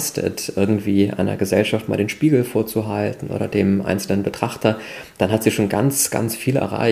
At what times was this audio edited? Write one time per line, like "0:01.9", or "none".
none